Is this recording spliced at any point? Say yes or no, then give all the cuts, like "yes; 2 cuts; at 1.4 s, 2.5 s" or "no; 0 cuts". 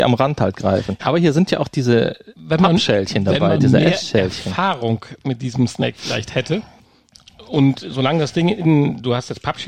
yes; 1 cut; at 1.0 s